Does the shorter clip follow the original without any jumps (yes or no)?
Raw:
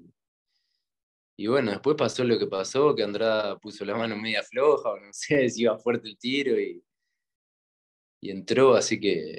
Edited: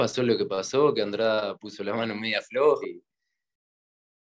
no